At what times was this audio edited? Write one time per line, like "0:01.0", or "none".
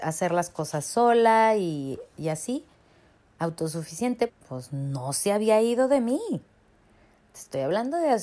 0:04.3